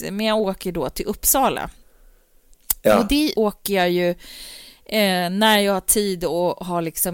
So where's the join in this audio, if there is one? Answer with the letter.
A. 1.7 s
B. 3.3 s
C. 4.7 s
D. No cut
B